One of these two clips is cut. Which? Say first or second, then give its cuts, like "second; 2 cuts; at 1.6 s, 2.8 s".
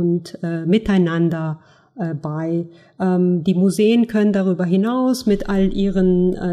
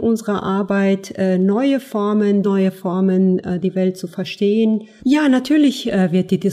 second; 2 cuts; at 2.4 s, 5.0 s